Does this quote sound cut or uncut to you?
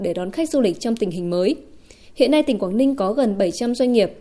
uncut